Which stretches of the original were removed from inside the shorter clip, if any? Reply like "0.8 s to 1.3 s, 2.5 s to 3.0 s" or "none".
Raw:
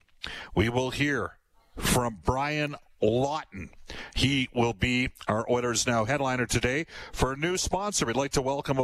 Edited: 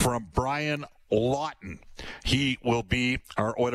none